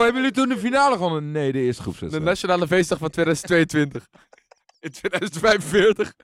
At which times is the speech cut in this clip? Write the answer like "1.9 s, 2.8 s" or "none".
none